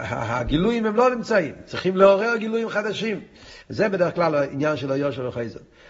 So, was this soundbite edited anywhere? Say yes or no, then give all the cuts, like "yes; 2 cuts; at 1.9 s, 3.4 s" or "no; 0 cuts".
yes; 1 cut; at 3.6 s